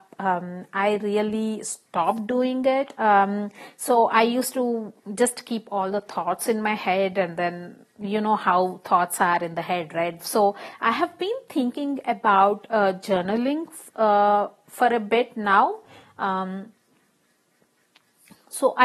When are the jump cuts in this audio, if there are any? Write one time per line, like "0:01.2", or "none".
0:10.2